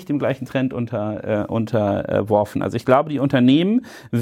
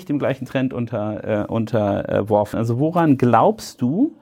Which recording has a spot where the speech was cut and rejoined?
second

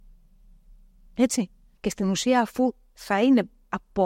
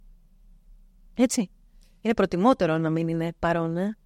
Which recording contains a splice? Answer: first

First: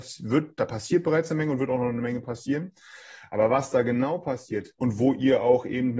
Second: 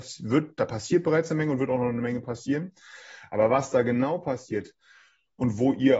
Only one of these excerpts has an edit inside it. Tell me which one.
first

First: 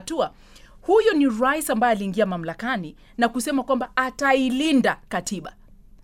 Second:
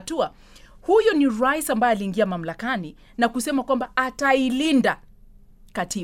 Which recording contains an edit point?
first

